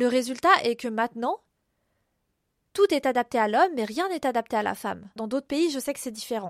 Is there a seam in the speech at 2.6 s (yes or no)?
no